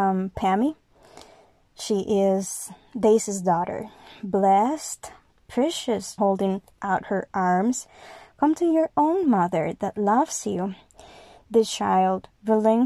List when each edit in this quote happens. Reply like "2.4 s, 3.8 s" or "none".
6.2 s